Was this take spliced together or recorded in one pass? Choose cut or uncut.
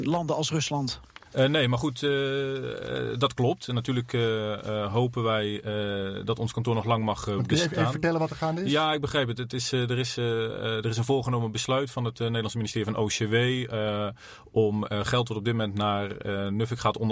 cut